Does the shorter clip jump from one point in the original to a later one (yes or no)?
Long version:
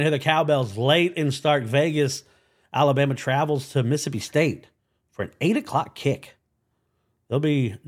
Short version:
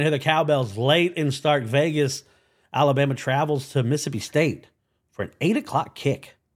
no